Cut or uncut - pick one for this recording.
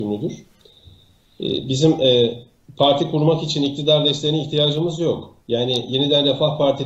cut